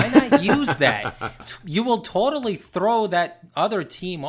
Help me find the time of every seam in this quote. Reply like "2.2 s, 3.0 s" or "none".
1.4 s